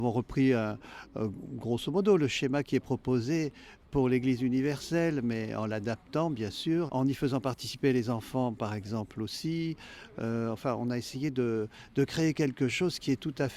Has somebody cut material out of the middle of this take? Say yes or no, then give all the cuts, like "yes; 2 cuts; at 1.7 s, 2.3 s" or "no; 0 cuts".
yes; 1 cut; at 6.9 s